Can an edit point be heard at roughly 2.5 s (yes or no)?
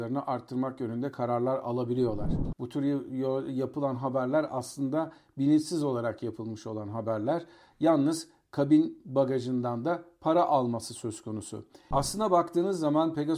yes